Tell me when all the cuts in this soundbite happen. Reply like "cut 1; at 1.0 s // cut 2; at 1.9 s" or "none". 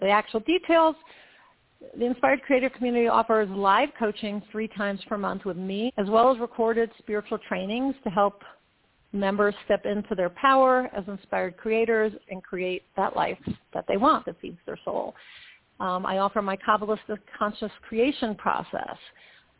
cut 1; at 5.9 s // cut 2; at 15.6 s